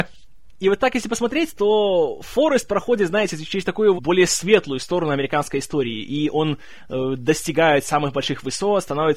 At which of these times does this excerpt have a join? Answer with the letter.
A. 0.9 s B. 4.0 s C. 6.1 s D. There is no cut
B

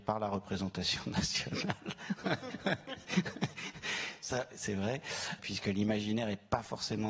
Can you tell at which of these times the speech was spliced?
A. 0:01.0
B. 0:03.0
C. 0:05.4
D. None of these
C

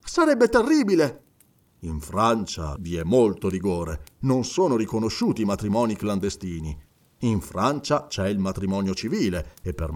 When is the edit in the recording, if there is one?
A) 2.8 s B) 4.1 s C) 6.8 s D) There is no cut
A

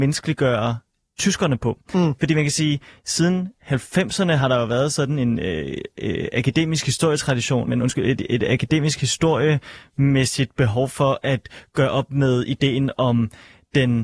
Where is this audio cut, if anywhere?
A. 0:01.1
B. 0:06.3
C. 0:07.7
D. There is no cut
C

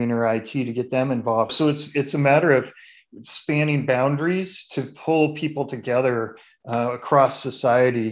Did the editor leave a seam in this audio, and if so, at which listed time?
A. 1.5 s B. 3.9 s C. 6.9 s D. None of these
A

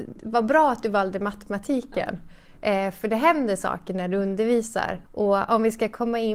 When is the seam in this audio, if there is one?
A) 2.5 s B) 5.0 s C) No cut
B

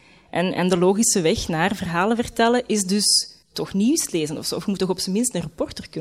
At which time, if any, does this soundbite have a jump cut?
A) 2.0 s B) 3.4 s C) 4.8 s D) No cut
B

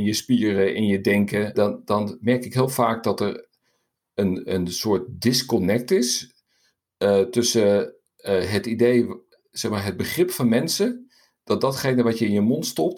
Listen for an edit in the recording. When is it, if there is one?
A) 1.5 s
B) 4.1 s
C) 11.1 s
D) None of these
A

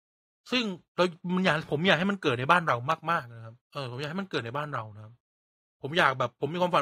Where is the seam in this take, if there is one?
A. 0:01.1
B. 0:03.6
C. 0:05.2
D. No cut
B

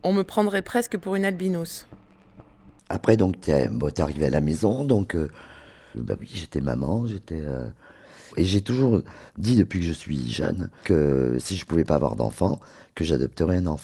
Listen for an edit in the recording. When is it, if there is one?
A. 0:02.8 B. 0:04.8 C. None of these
A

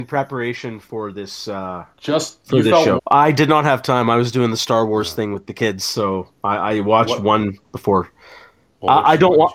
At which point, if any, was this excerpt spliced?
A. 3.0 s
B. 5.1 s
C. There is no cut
A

